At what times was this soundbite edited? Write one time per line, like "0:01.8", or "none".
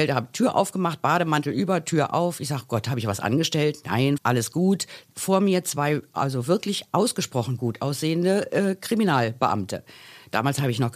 0:04.2